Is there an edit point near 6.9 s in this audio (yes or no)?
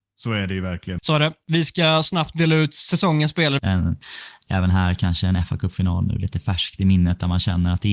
no